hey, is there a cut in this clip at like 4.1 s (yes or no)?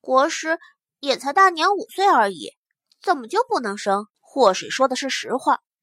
yes